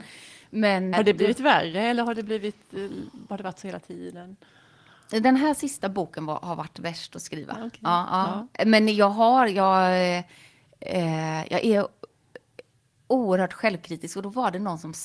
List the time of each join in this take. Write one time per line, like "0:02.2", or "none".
0:00.9

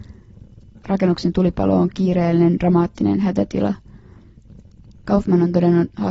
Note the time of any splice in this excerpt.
0:05.0

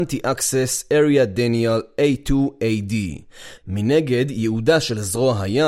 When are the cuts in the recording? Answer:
0:03.6

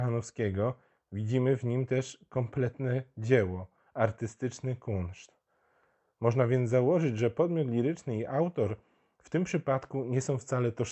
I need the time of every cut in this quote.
none

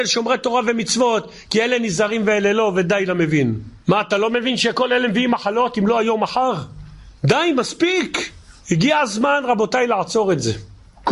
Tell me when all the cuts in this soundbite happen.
0:03.8

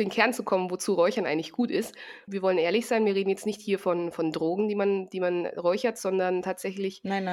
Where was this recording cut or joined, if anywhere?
0:02.3

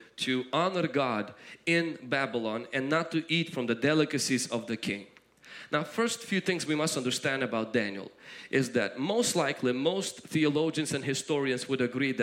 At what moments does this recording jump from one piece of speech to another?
none

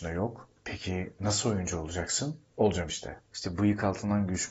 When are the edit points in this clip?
0:03.3

